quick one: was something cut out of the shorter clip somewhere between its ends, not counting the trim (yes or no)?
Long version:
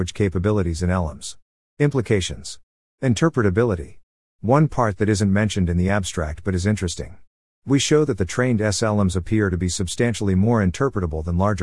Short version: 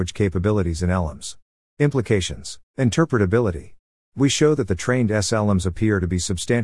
yes